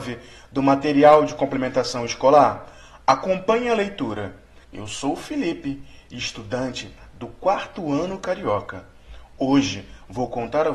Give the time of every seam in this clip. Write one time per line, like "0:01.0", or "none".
0:04.6